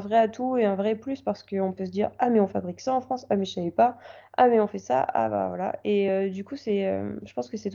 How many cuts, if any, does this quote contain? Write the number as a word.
zero